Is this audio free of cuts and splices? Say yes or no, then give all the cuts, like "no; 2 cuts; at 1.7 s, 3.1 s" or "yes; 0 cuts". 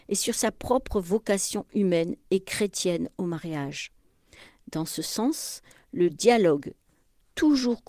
yes; 0 cuts